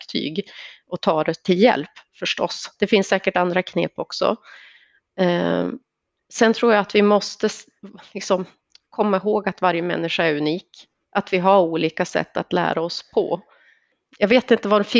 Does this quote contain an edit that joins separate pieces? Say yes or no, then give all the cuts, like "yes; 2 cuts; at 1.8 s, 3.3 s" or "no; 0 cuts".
no; 0 cuts